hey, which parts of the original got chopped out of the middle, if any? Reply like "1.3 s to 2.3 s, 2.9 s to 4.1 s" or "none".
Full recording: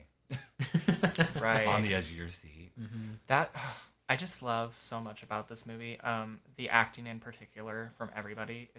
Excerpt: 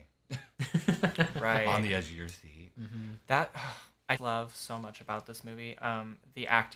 4.2 s to 4.4 s